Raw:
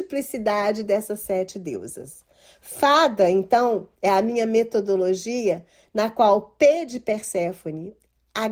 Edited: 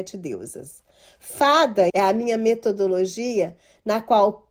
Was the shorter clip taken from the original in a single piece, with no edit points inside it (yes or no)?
no